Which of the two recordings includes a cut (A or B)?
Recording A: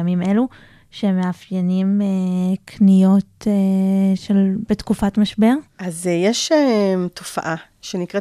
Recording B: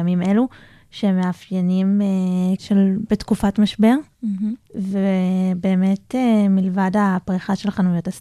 B